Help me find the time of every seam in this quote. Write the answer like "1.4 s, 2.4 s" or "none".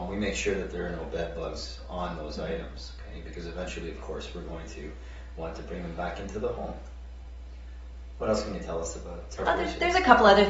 9.4 s